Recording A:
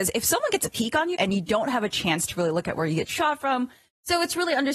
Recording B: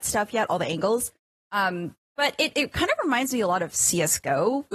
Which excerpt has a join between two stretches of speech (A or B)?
A